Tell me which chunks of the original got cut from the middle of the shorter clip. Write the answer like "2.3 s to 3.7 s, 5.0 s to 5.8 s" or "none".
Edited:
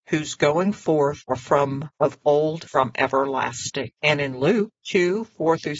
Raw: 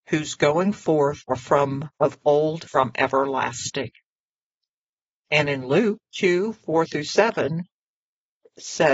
3.9 s to 5.2 s